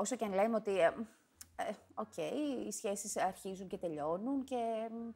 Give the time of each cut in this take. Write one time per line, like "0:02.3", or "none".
none